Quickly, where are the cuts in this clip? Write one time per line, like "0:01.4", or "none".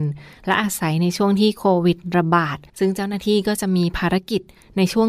0:02.7